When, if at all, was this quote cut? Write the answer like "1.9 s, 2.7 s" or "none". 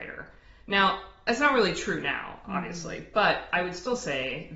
none